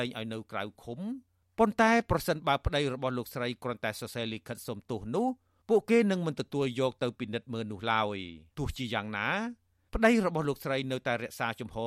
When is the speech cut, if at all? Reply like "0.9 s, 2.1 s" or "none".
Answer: 8.5 s